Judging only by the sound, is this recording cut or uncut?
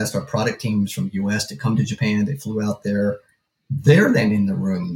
uncut